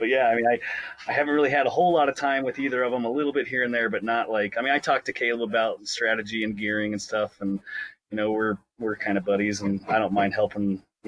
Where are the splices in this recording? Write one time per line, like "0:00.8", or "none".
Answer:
none